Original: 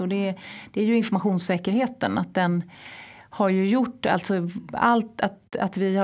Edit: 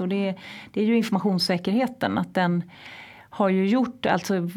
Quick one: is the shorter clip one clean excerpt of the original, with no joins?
yes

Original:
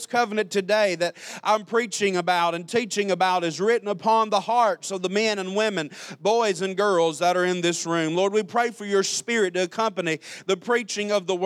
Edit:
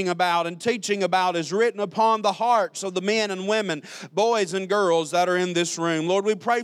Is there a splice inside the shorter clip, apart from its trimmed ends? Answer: no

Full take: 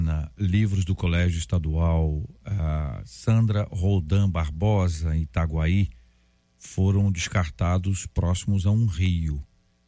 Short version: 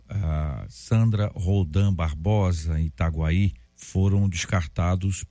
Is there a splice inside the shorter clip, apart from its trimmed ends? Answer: yes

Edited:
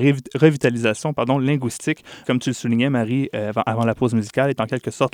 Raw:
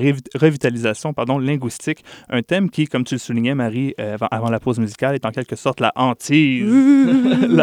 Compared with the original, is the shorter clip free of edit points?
no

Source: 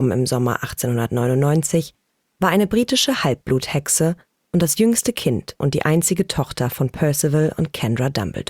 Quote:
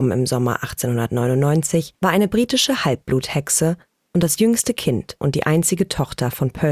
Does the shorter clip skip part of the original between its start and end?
yes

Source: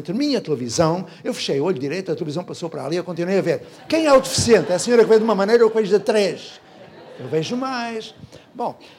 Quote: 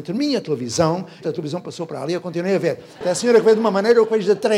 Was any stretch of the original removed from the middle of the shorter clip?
yes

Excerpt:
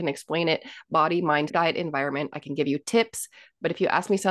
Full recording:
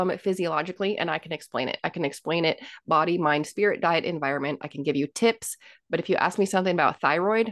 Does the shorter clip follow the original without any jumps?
no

